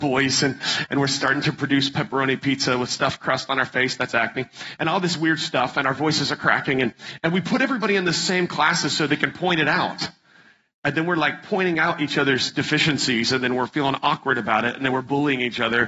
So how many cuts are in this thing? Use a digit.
0